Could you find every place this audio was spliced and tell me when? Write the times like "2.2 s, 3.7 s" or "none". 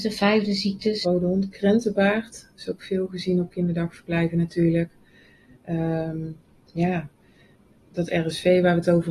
1.0 s